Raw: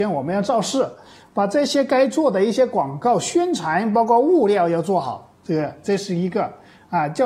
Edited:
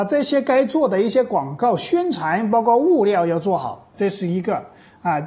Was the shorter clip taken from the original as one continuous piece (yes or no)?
no